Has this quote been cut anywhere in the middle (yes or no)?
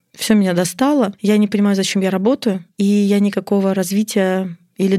no